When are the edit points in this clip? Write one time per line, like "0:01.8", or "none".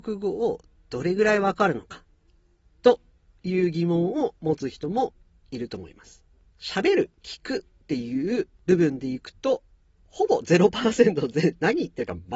none